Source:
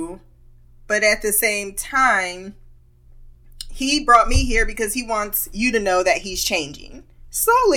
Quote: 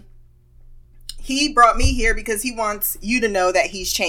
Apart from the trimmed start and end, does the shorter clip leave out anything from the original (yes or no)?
no